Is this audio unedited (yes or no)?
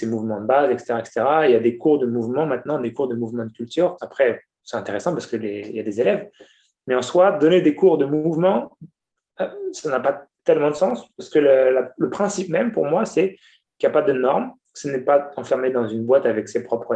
no